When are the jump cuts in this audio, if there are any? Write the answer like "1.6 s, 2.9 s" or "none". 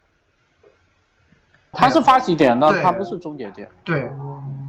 1.7 s